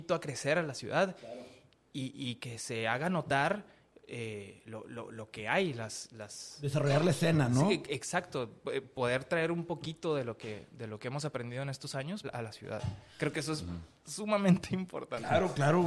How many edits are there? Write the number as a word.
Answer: one